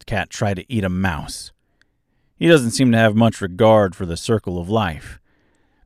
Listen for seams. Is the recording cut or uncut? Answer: uncut